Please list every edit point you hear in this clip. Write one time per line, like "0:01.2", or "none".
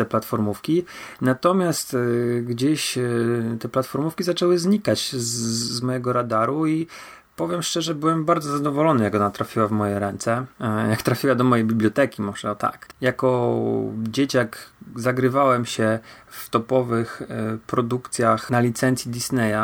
0:12.9